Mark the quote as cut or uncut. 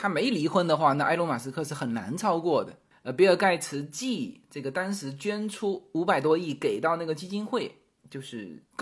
cut